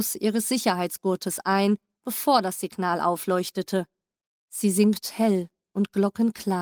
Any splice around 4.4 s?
yes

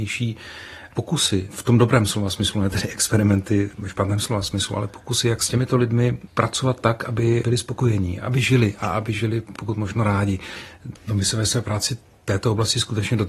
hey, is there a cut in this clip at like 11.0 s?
yes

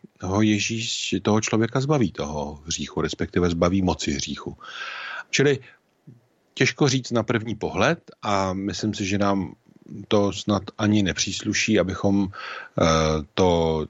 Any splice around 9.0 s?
no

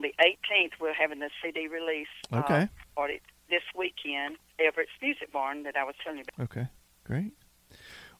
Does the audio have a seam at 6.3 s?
yes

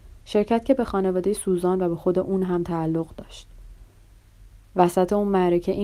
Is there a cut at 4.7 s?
no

